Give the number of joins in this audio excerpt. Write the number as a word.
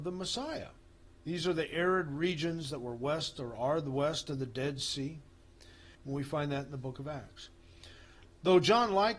three